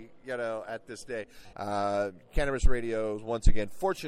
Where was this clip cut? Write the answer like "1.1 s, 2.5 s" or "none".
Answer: 1.5 s